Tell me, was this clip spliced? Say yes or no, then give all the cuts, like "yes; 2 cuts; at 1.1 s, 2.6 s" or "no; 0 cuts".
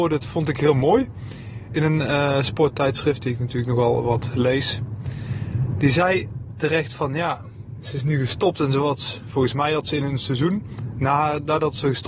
no; 0 cuts